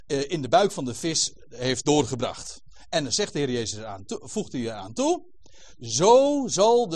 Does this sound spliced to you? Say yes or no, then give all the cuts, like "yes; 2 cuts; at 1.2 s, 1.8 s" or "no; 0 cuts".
no; 0 cuts